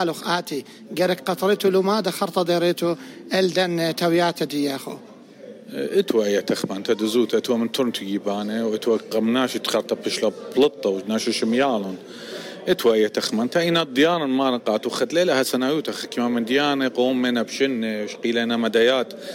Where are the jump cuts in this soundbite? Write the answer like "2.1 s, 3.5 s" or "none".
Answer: none